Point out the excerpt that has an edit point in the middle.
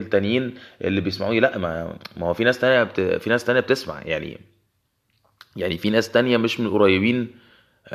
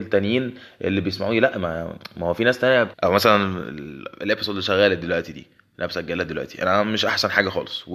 second; 1 cut; at 2.9 s

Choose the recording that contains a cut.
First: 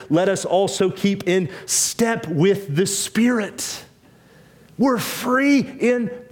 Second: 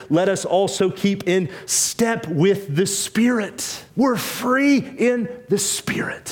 second; 1 cut; at 3.9 s

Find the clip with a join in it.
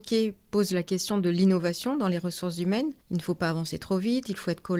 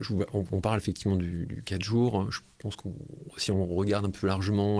first; 1 cut; at 3.0 s

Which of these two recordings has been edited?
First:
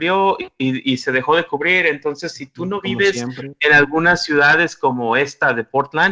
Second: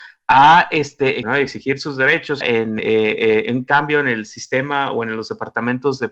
second; 2 cuts; at 1.2 s, 2.4 s

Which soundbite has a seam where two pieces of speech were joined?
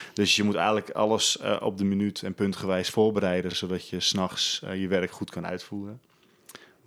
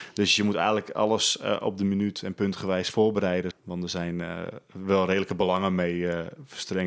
second; 1 cut; at 3.5 s

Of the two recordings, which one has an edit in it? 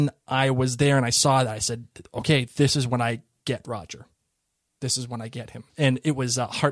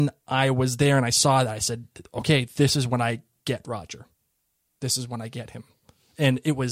first; 1 cut; at 5.7 s

